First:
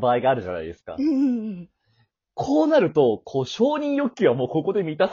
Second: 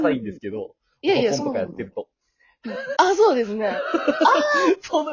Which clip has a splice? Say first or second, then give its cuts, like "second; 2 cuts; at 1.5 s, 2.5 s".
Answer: second; 1 cut; at 2.9 s